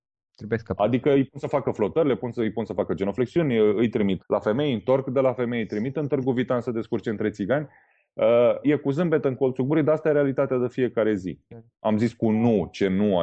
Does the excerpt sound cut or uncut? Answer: cut